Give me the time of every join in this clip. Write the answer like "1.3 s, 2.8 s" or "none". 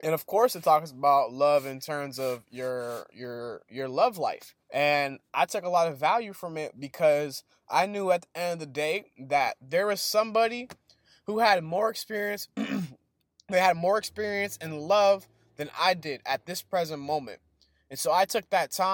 4.6 s